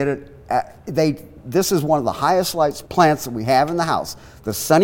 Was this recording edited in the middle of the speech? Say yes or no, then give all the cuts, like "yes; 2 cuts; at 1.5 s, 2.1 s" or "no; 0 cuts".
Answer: yes; 1 cut; at 2.9 s